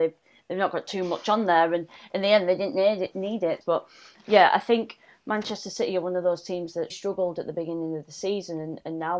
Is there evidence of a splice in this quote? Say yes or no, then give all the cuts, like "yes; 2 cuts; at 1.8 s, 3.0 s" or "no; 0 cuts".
yes; 2 cuts; at 3.6 s, 6.9 s